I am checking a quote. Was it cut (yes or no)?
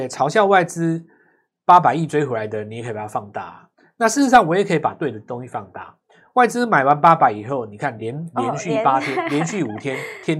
no